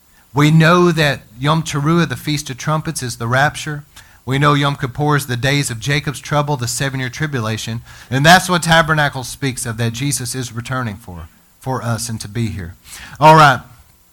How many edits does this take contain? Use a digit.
1